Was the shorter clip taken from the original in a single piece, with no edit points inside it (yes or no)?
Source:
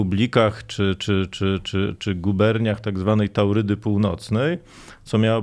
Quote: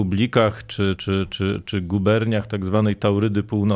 no